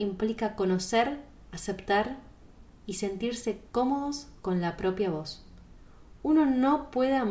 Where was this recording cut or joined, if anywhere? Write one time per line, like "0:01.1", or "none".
none